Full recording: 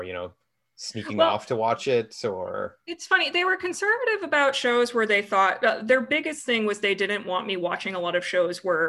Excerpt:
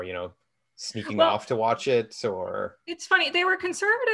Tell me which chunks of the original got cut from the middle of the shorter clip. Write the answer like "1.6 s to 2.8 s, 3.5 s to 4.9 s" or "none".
none

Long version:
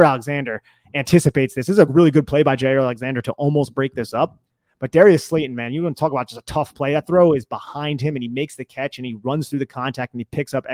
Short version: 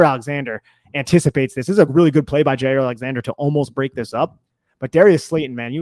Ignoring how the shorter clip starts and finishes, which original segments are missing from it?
none

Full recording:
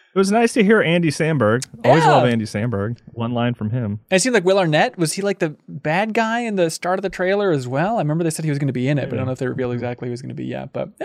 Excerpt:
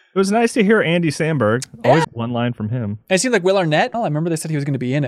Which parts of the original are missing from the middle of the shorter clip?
2.0 s to 3.1 s, 5.0 s to 7.9 s

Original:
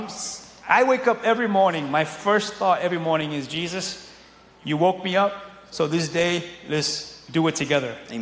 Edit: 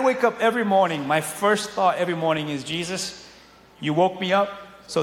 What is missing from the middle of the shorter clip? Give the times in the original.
none

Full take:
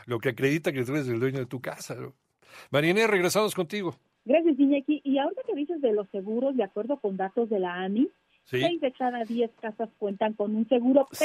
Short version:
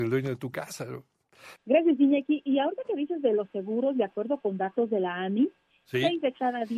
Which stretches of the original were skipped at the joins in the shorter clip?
2.7 s to 4.2 s

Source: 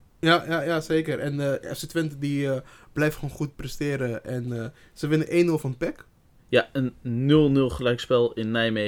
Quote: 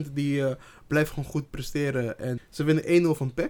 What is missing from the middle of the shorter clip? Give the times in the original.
4.4 s to 4.8 s

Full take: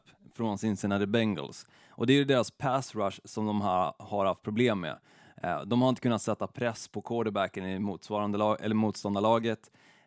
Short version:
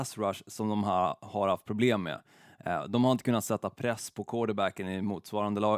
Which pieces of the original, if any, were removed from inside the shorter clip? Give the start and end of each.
none

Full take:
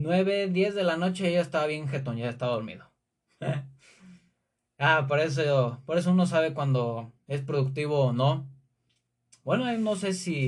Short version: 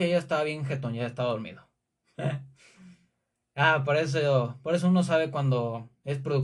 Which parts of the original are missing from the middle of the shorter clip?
none

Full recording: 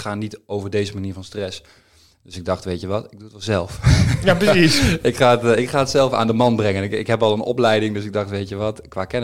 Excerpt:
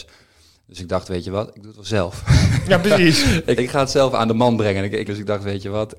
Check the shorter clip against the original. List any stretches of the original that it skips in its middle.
5.1 s to 5.6 s, 7.1 s to 7.9 s

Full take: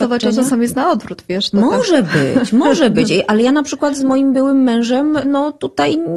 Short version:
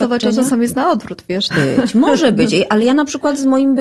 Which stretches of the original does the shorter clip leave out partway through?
1.5 s to 2.1 s

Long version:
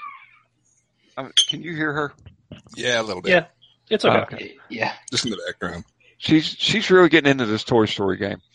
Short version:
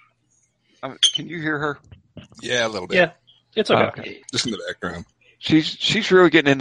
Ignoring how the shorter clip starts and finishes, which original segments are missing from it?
4.6 s to 5.0 s

